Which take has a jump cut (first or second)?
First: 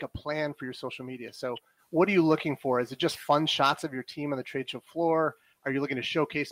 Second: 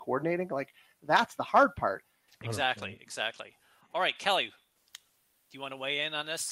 second